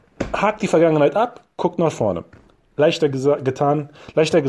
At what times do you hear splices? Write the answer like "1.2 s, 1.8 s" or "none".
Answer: none